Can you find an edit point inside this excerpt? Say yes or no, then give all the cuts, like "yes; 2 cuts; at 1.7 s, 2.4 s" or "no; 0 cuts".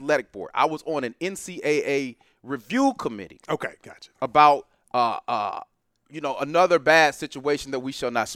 no; 0 cuts